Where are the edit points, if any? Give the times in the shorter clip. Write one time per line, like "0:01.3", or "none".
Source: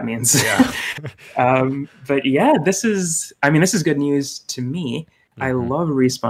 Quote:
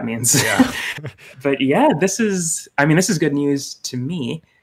0:01.3

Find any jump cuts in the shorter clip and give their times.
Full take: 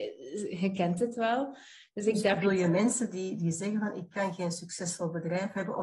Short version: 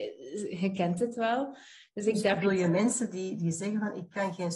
none

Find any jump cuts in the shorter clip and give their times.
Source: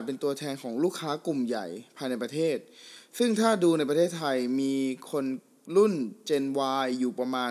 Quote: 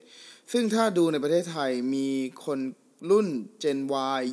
none

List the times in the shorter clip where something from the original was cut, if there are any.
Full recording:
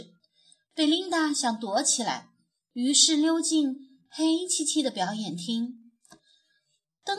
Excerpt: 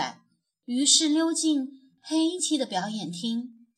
0:02.4

